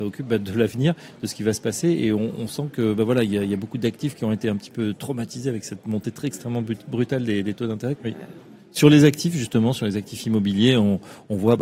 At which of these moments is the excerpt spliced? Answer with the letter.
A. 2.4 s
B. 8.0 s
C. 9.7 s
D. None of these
B